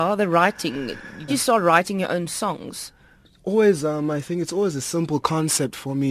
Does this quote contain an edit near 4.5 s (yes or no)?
no